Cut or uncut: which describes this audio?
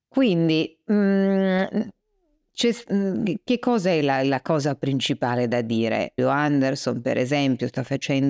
cut